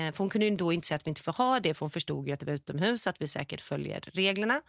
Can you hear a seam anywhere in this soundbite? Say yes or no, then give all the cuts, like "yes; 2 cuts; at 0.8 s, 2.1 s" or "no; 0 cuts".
no; 0 cuts